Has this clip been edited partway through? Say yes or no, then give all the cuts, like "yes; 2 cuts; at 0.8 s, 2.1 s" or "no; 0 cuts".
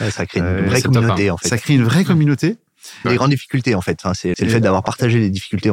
yes; 2 cuts; at 3.0 s, 4.3 s